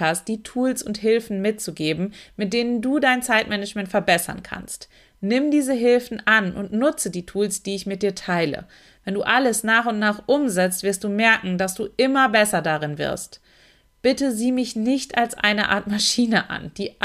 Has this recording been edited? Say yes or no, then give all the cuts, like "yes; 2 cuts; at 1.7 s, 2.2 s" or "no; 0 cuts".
no; 0 cuts